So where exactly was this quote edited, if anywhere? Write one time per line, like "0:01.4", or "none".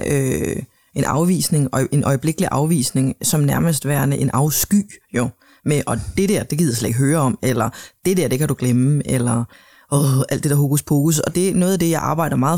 0:11.3